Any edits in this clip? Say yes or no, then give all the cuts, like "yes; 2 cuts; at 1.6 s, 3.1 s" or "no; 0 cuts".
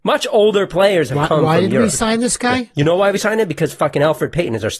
no; 0 cuts